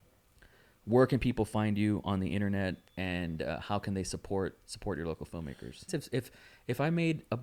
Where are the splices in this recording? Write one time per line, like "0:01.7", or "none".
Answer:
0:05.9